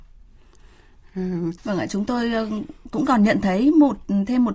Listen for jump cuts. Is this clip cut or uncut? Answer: cut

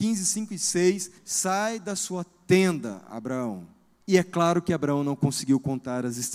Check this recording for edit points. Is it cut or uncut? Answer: cut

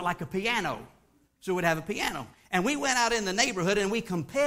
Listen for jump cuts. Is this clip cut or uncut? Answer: uncut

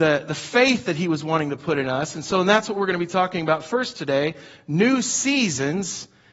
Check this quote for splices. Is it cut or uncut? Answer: uncut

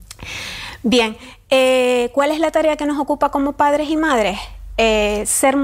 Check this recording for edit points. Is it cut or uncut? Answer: uncut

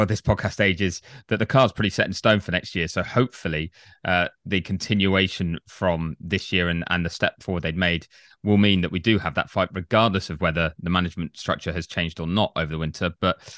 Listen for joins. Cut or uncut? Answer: uncut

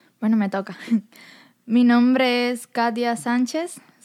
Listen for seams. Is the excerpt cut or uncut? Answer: uncut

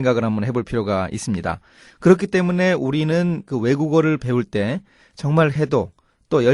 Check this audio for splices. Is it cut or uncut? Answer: cut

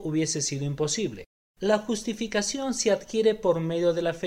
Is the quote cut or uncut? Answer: cut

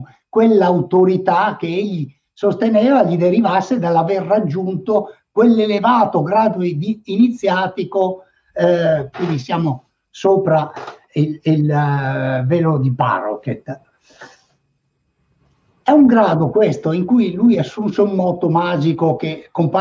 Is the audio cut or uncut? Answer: cut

